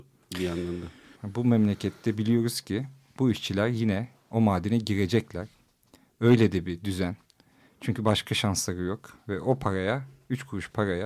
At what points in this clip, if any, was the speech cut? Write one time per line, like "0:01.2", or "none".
0:01.1

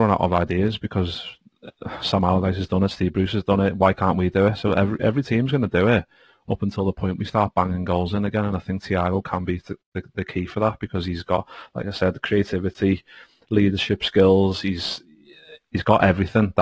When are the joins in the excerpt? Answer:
none

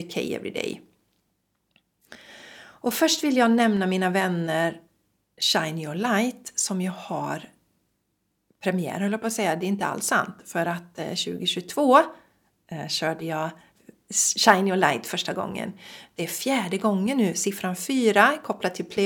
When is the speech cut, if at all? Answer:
none

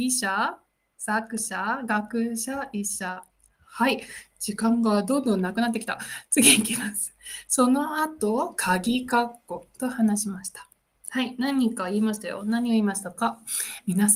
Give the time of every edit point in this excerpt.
none

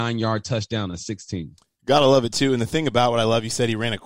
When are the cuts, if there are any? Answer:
none

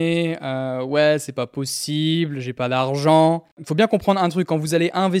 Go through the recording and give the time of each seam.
none

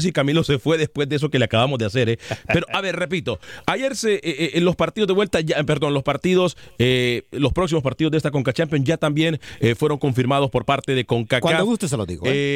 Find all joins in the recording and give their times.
none

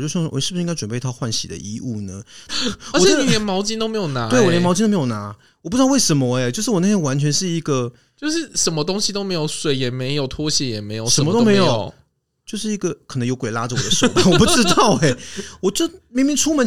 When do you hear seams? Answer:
0:02.5

